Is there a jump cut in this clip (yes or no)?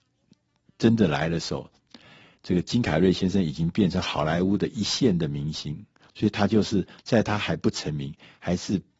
yes